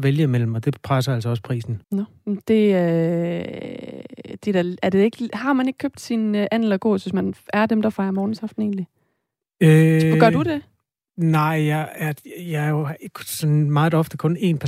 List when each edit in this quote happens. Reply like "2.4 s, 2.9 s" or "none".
1.8 s